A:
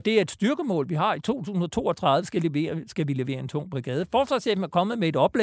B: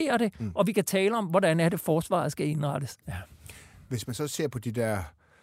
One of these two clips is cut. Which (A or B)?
B